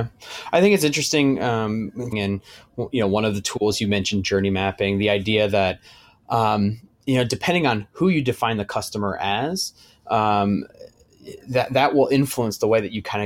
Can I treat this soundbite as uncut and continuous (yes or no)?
no